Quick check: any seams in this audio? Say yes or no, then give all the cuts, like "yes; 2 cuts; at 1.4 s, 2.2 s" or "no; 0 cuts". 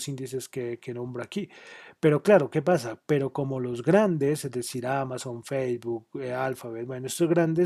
no; 0 cuts